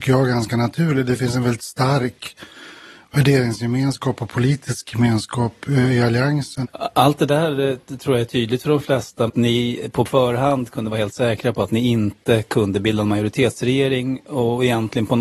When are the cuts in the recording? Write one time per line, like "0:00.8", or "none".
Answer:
0:06.6
0:09.3